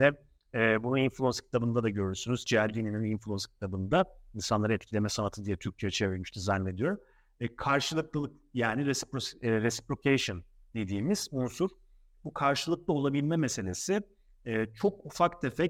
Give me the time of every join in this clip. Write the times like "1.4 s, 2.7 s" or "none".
none